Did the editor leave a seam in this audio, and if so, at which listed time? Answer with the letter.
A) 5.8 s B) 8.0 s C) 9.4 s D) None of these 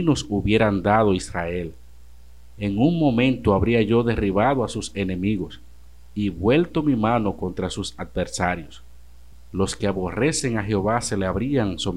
D